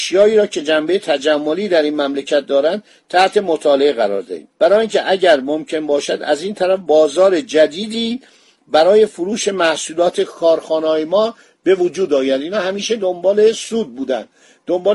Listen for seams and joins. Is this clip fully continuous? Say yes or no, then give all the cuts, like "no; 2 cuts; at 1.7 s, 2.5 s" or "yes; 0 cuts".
no; 1 cut; at 4.5 s